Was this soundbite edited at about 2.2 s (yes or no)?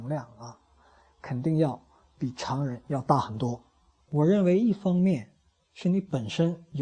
no